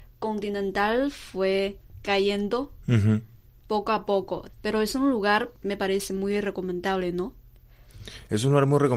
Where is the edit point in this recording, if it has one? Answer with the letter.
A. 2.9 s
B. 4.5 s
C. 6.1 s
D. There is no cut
B